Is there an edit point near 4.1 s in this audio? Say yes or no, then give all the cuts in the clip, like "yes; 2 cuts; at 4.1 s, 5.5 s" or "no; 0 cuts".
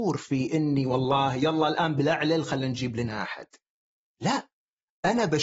no; 0 cuts